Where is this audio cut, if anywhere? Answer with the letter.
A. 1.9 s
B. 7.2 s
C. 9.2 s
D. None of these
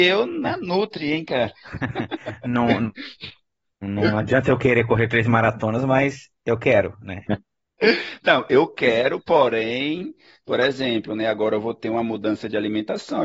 B